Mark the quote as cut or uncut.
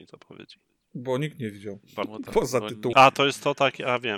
cut